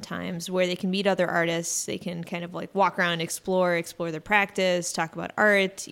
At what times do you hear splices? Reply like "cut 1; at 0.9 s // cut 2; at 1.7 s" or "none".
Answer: none